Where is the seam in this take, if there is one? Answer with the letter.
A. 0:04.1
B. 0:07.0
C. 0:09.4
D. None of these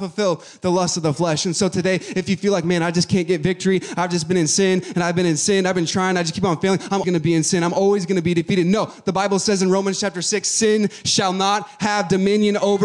B